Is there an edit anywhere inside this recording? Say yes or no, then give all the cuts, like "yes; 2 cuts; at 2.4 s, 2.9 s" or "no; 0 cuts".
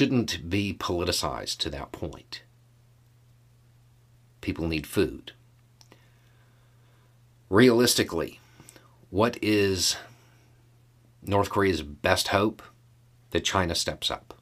no; 0 cuts